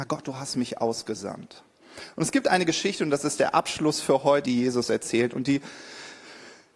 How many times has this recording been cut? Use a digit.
1